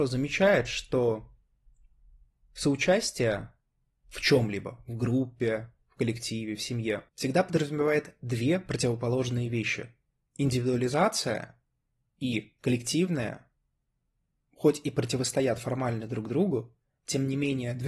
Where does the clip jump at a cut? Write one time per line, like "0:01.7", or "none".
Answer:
0:07.1
0:10.2